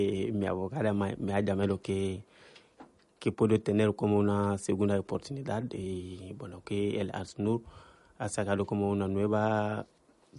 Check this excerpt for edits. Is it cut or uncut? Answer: uncut